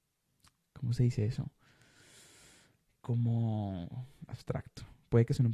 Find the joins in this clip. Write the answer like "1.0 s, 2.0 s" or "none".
4.3 s